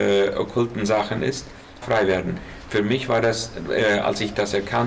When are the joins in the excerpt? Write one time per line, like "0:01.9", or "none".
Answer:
0:01.8